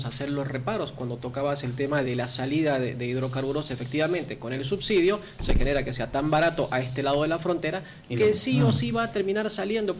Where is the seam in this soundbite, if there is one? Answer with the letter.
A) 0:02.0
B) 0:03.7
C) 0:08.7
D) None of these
A